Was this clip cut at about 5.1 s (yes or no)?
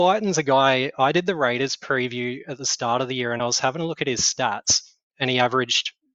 yes